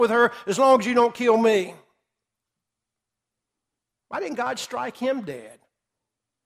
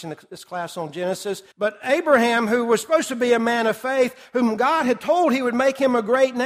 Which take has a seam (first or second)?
second